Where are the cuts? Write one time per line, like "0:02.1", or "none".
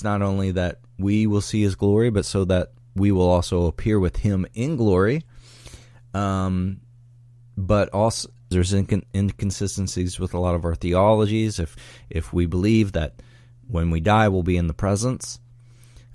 0:08.5